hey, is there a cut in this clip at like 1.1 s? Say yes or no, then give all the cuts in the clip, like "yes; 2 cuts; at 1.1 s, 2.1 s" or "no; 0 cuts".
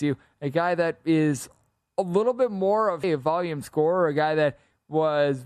no; 1 cut; at 3.0 s